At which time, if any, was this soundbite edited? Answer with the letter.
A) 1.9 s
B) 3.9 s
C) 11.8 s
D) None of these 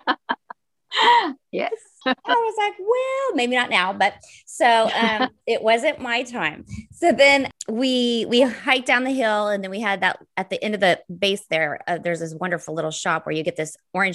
D